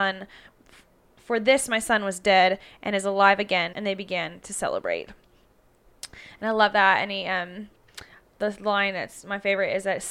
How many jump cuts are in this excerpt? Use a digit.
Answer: 1